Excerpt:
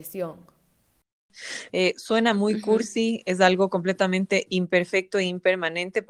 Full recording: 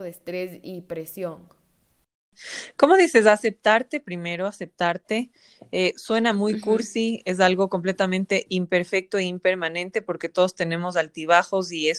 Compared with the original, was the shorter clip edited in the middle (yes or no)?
yes